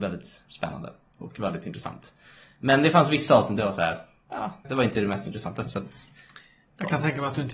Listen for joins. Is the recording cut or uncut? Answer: cut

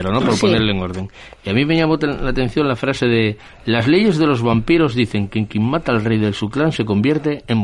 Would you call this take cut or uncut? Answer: uncut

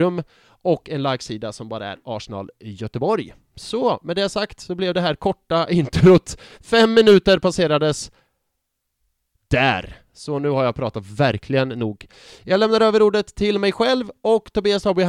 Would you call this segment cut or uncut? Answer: uncut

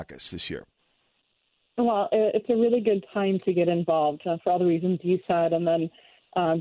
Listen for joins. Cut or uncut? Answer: uncut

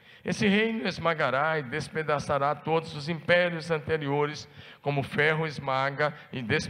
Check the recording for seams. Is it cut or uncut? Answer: uncut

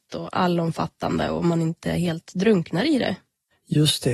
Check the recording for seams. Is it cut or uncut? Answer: uncut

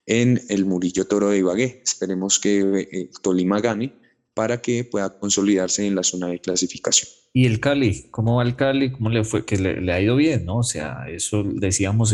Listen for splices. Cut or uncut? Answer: uncut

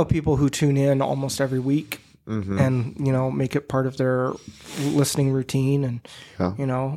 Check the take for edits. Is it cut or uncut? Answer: uncut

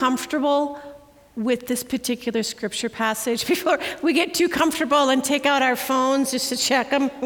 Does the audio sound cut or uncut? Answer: uncut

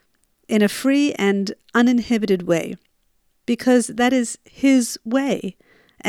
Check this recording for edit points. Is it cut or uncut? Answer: uncut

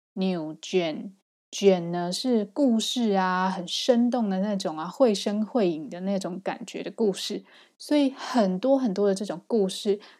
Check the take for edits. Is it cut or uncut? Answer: uncut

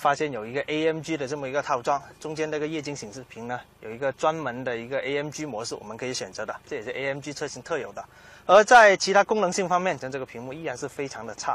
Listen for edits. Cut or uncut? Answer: cut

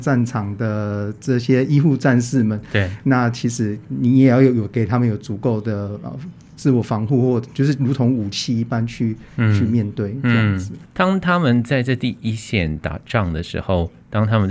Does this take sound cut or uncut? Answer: cut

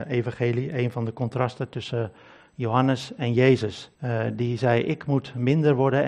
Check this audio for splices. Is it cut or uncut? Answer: cut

